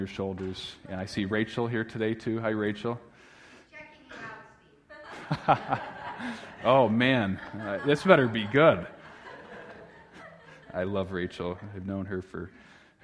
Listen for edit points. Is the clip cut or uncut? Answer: uncut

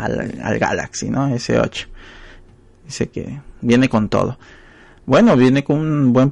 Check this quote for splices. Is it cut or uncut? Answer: uncut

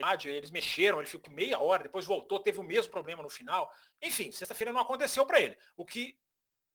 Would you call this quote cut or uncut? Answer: uncut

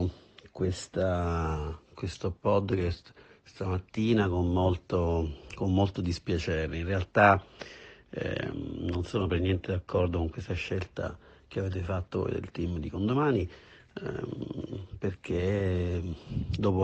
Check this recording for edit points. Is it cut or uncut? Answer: uncut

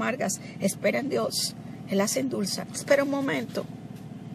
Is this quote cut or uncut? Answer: cut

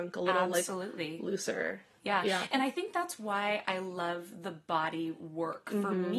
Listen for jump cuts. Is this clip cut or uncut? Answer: uncut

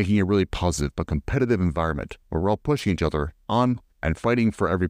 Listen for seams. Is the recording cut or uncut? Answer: cut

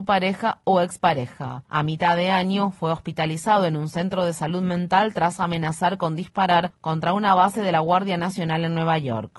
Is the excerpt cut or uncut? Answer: cut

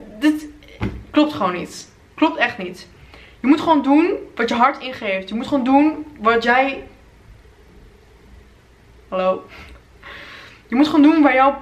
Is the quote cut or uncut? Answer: uncut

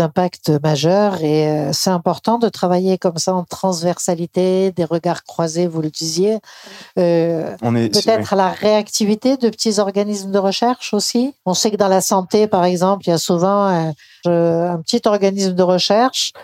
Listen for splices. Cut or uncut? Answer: cut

